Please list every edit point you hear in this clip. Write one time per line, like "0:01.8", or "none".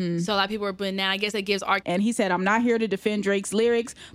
0:01.8